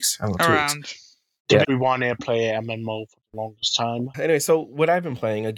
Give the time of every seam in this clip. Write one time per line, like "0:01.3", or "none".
0:01.6
0:04.1